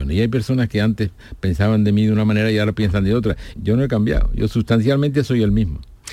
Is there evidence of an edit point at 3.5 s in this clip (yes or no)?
yes